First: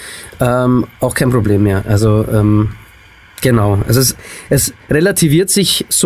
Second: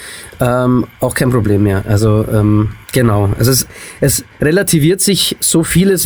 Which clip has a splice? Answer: second; 1 cut; at 2.8 s

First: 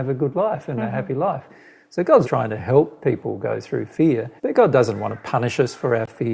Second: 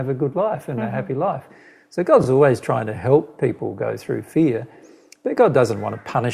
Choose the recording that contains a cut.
first; 2 cuts; at 2.2 s, 4.4 s

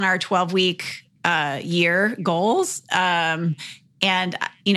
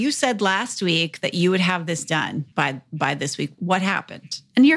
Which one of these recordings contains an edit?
second; 2 cuts; at 2.5 s, 3.5 s

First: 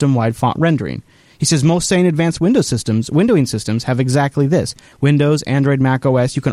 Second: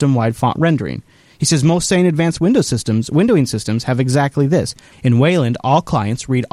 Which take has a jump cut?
second; 1 cut; at 4.9 s

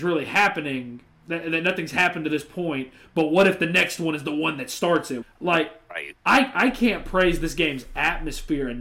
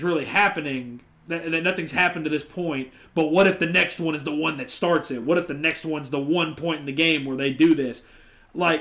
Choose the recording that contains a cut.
first; 1 cut; at 5.2 s

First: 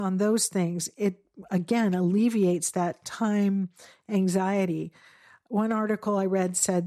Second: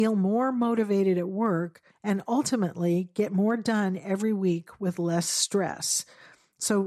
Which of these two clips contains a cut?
second; 1 cut; at 1.9 s

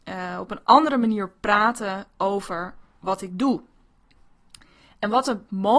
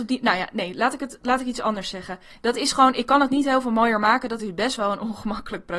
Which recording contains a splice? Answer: second; 1 cut; at 2.3 s

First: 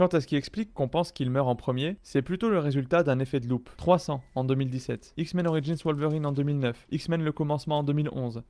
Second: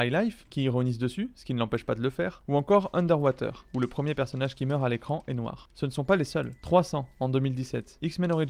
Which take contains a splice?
first; 1 cut; at 3.8 s

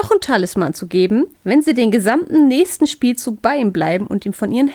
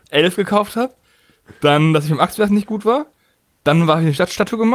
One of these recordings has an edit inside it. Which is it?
first; 1 cut; at 1.3 s

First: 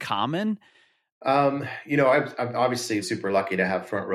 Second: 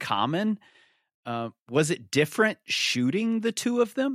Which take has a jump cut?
first; 2 cuts; at 1.1 s, 3.0 s

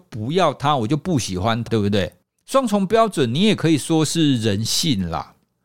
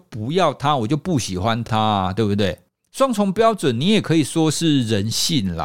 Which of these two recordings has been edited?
first; 1 cut; at 1.7 s

